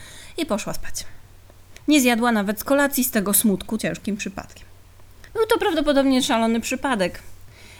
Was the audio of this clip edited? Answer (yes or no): yes